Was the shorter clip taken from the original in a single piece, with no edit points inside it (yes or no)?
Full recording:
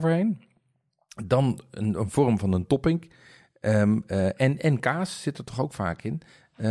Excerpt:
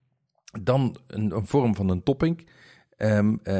yes